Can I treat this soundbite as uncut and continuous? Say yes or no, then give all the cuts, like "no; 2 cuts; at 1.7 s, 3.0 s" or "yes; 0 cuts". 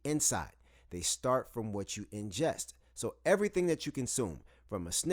yes; 0 cuts